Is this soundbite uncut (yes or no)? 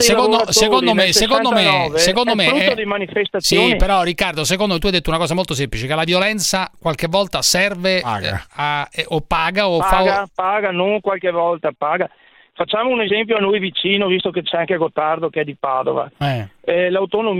yes